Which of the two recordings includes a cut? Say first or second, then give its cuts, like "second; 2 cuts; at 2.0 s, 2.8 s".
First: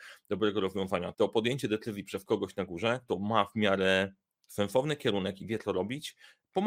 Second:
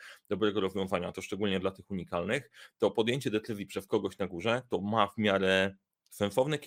first; 1 cut; at 1.1 s